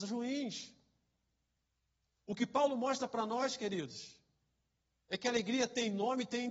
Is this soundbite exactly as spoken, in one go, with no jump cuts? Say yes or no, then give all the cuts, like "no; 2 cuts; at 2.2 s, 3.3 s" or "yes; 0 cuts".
yes; 0 cuts